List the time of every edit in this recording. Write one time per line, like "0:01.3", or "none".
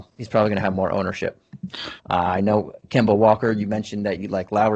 0:02.0